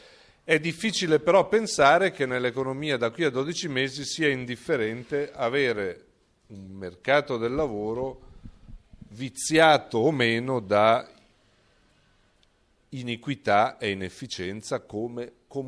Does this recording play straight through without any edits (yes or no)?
yes